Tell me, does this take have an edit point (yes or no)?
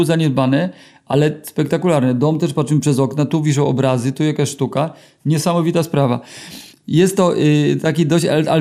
yes